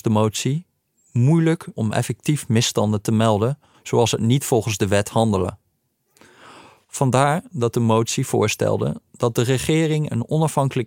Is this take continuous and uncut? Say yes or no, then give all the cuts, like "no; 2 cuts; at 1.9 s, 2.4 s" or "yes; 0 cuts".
no; 1 cut; at 1.7 s